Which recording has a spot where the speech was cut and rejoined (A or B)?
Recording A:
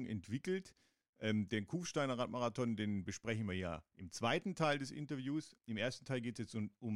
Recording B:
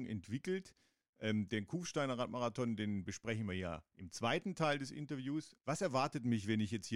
B